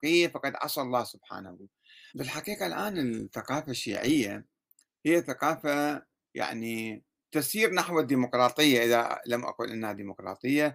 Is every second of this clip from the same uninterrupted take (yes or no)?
no